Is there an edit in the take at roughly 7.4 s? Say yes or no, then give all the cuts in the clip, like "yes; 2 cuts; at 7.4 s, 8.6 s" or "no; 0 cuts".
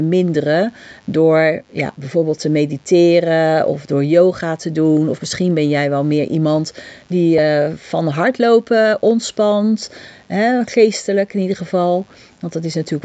no; 0 cuts